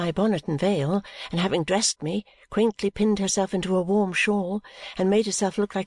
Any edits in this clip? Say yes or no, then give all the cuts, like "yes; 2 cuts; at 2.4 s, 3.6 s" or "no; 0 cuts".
no; 0 cuts